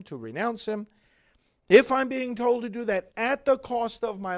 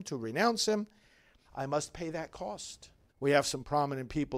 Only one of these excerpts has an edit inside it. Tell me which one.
second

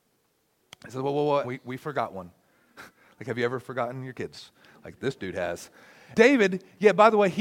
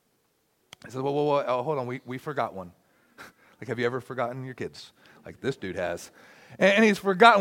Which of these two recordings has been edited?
first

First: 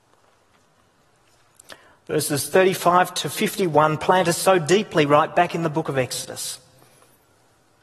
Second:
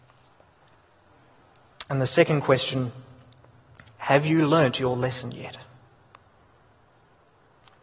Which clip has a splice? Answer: second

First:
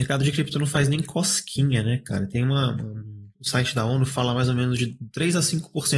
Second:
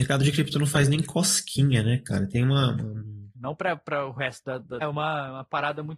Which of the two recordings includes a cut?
second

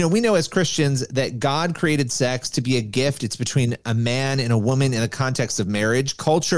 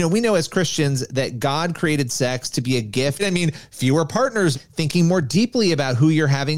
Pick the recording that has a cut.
second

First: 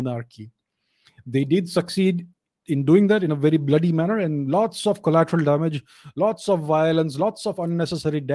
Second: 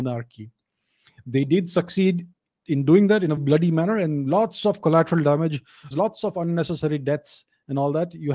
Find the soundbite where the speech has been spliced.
second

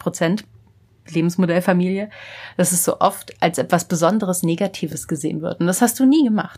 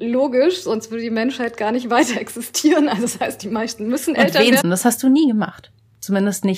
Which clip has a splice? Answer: second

